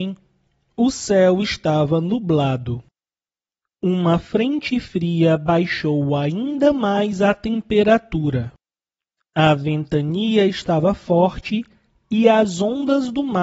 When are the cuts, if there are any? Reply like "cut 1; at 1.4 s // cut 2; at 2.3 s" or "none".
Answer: none